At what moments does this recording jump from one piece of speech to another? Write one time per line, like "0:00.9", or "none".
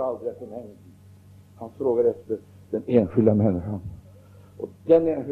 none